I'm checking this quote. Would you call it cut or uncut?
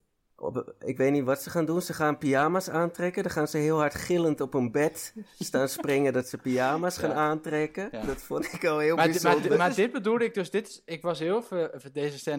uncut